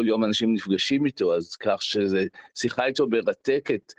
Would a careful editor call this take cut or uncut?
uncut